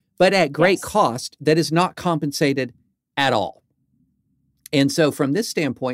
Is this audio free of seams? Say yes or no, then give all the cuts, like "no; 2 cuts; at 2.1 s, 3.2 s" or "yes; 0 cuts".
yes; 0 cuts